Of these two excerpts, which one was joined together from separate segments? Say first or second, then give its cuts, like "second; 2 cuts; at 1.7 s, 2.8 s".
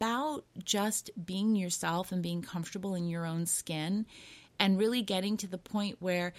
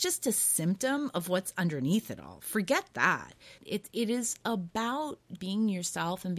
second; 2 cuts; at 3.6 s, 5.4 s